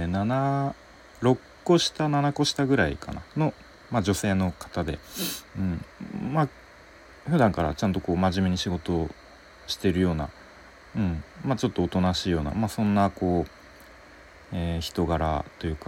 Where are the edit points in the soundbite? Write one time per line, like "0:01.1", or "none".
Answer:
none